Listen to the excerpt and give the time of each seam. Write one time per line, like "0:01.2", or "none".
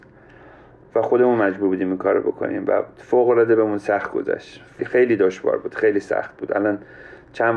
0:04.8